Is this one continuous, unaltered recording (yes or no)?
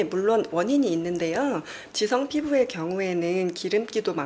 no